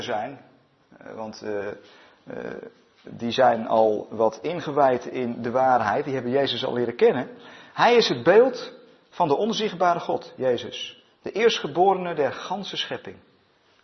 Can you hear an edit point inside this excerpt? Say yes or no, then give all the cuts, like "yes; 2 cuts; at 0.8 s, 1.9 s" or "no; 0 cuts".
no; 0 cuts